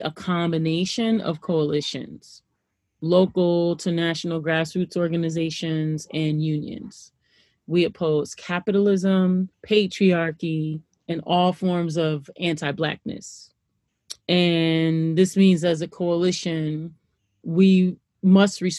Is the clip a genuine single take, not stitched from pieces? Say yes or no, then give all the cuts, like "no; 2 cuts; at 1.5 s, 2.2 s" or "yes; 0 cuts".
no; 2 cuts; at 9.5 s, 14.2 s